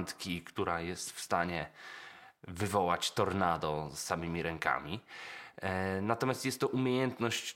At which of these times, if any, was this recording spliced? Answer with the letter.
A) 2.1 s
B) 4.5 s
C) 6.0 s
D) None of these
D